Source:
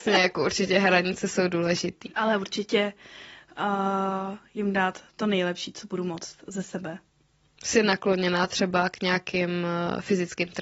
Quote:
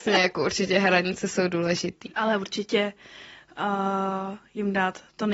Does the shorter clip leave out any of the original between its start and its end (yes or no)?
no